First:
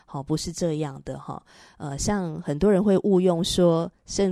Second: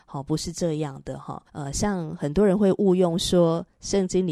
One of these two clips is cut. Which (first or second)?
second